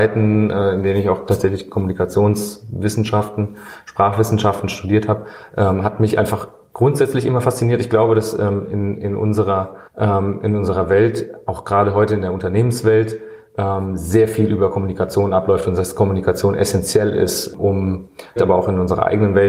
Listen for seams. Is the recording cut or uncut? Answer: cut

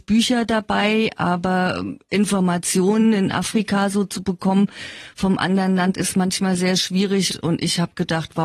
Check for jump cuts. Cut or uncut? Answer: cut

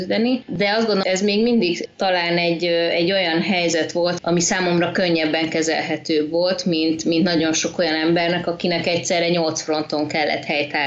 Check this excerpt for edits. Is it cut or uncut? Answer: cut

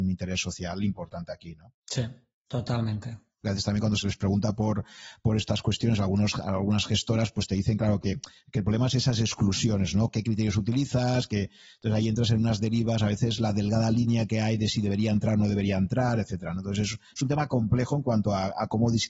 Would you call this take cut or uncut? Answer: cut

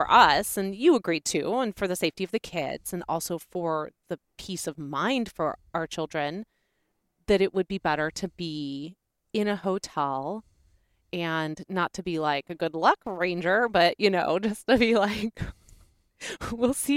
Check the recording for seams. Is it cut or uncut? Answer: uncut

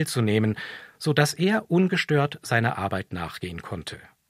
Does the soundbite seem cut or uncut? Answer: uncut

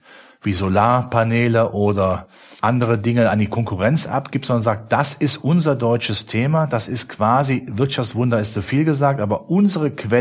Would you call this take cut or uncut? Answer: uncut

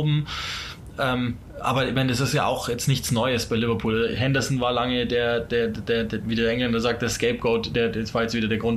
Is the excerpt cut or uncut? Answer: uncut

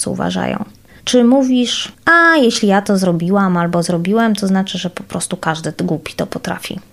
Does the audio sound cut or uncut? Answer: cut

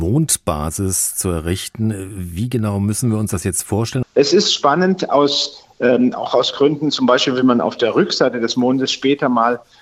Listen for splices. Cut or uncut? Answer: cut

